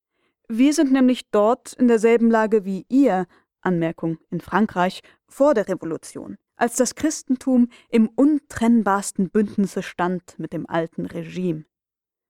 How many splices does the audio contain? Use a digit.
1